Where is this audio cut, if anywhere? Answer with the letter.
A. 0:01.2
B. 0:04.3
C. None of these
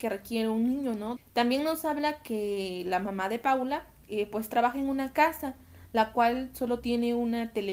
A